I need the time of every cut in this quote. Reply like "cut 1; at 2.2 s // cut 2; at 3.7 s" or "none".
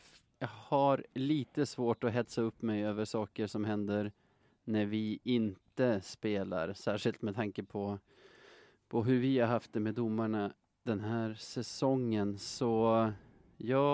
none